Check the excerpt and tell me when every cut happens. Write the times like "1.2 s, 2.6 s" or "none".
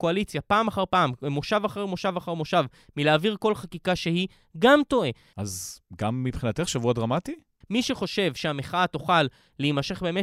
5.3 s, 7.6 s